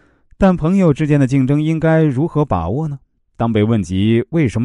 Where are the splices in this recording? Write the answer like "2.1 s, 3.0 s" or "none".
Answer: 3.2 s